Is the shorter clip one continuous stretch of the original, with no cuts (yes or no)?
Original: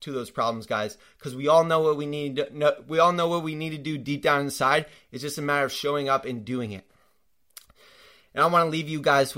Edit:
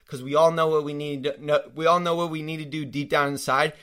yes